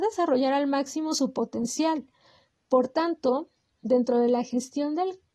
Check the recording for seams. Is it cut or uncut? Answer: uncut